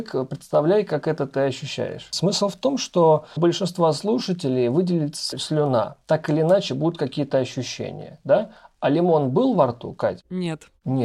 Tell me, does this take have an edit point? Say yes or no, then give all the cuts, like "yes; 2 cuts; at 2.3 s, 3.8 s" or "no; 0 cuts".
no; 0 cuts